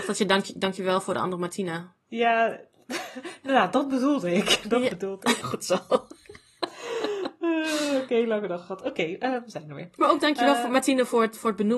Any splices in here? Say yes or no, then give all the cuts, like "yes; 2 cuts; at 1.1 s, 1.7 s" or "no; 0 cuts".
yes; 1 cut; at 5.4 s